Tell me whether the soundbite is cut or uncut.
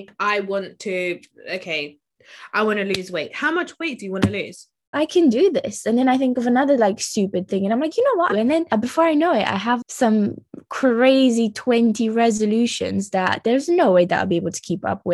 cut